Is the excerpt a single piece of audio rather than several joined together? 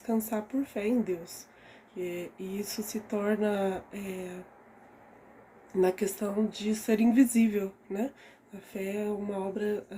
yes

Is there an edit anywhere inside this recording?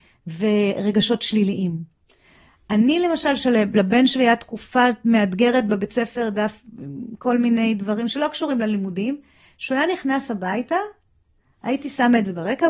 no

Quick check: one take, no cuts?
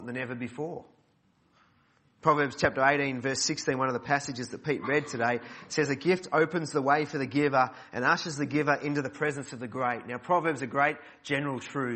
yes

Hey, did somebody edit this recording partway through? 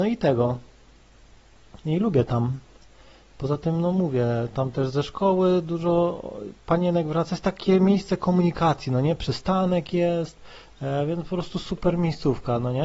no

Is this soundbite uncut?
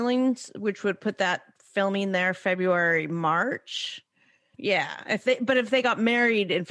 no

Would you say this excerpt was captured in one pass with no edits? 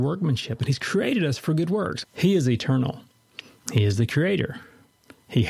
no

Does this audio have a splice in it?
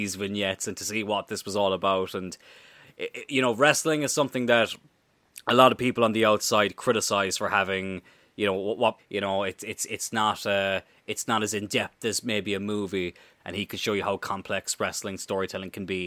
yes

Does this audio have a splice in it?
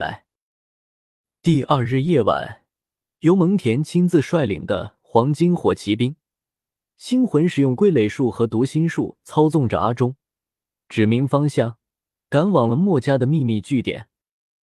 no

